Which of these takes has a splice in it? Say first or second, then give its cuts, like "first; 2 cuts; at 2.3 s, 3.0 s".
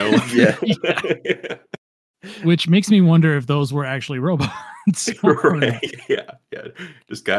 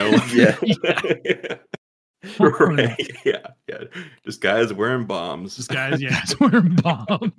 second; 2 cuts; at 2.4 s, 6.1 s